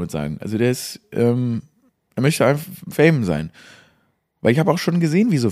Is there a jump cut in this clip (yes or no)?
no